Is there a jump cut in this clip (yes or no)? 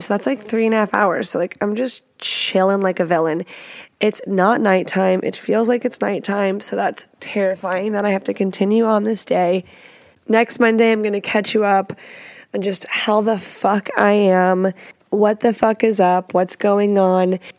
no